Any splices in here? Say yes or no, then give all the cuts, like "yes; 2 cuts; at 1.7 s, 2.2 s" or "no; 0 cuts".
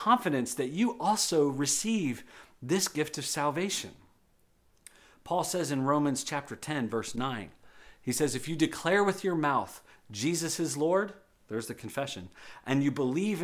no; 0 cuts